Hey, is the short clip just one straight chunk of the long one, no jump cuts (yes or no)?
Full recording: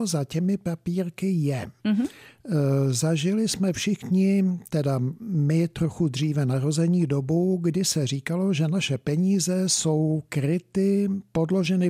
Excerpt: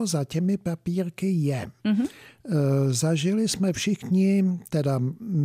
yes